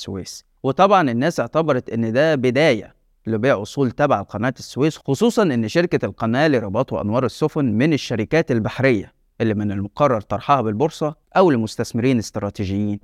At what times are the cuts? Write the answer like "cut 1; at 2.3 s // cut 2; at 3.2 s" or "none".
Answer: cut 1; at 11.2 s